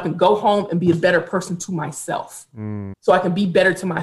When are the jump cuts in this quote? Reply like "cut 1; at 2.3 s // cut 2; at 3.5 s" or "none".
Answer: cut 1; at 2.9 s